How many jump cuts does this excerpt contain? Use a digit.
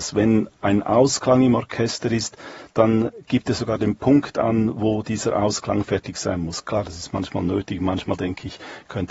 0